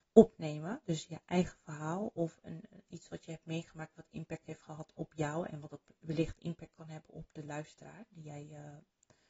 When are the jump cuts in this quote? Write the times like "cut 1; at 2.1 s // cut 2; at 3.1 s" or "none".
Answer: none